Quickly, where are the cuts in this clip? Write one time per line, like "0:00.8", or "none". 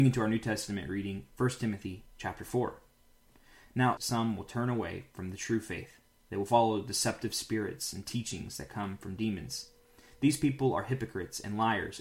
0:04.0